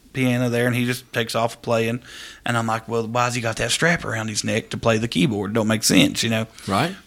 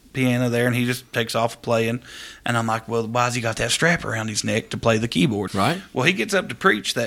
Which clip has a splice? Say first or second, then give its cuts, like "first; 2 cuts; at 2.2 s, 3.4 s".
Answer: second; 1 cut; at 5.5 s